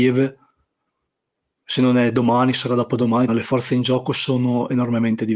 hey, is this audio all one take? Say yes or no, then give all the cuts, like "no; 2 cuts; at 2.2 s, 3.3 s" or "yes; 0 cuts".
no; 1 cut; at 3.3 s